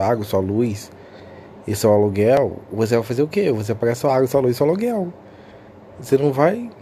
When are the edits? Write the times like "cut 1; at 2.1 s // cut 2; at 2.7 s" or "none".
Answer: none